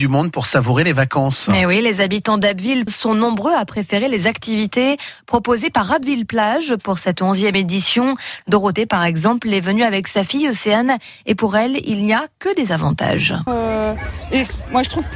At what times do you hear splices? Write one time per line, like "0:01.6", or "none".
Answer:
0:02.9
0:08.4
0:13.5

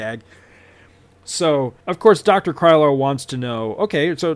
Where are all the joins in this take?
0:01.8

